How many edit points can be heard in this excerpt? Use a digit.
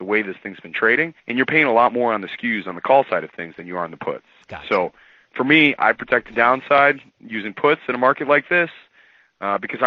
1